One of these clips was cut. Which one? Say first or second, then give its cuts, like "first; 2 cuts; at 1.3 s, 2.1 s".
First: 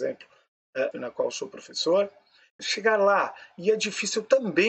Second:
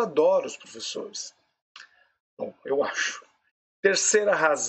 first; 2 cuts; at 0.9 s, 2.6 s